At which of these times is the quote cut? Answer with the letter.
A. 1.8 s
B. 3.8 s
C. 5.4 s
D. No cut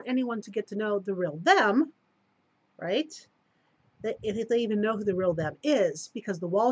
D